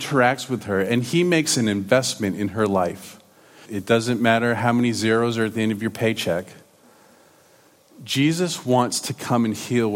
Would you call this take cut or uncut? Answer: cut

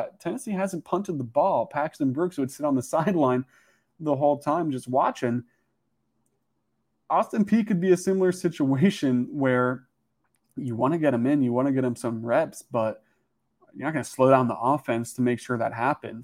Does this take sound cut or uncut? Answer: uncut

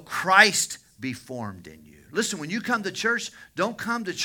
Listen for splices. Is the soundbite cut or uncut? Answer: cut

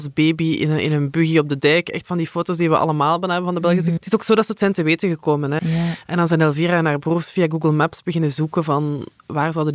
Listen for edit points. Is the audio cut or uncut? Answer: cut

